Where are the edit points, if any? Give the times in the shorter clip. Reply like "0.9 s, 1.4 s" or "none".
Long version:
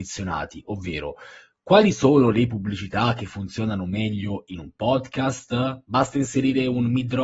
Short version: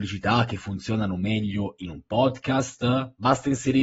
none